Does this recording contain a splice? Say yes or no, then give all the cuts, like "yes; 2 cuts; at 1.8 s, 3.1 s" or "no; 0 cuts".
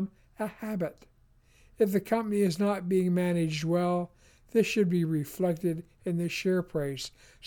no; 0 cuts